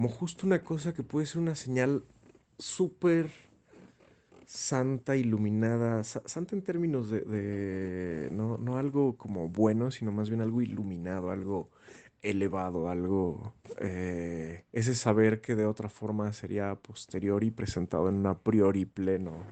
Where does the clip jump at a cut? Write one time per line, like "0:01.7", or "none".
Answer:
0:14.7

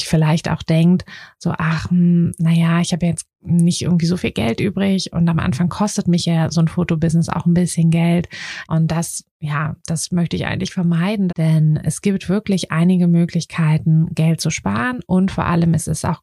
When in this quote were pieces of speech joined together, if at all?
0:08.6
0:11.3

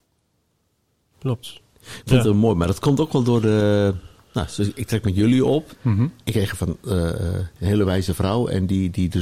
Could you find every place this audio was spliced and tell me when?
0:05.7
0:07.6

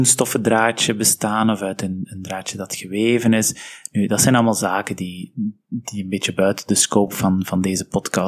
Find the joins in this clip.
none

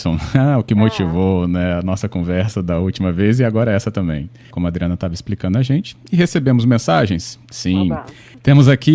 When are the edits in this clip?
0:04.5

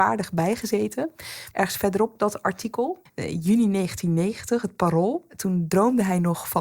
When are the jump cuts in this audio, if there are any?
0:01.5
0:03.1

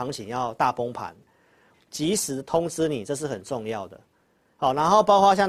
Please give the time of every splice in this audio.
0:01.7

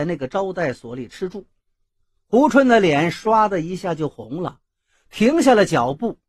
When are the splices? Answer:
none

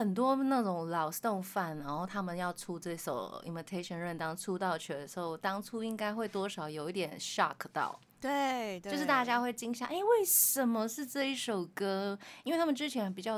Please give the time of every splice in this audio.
none

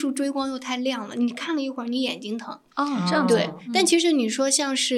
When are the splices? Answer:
none

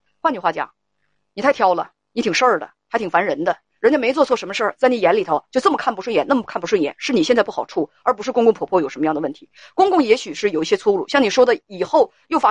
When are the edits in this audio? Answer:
none

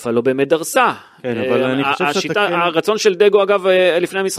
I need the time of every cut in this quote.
none

